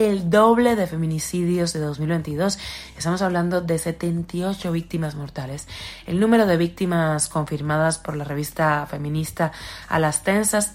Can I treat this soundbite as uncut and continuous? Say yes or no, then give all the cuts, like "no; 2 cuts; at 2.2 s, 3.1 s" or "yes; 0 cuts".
yes; 0 cuts